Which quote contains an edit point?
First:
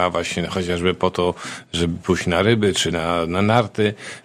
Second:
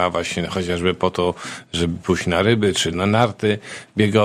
second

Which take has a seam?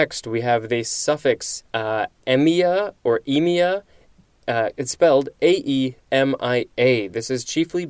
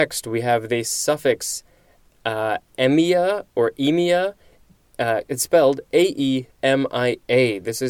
first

